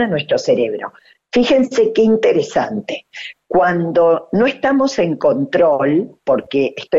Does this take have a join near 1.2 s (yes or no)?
no